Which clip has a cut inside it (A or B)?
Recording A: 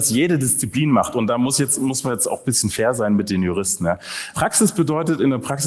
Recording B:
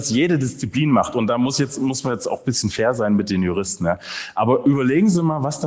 A